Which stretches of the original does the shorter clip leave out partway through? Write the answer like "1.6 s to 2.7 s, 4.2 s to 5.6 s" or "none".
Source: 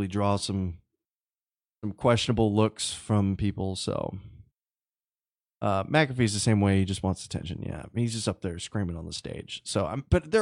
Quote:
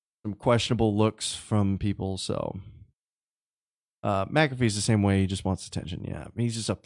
none